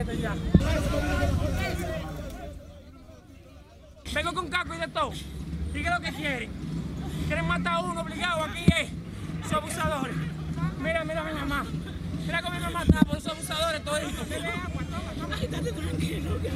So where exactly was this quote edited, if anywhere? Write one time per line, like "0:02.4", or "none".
0:04.1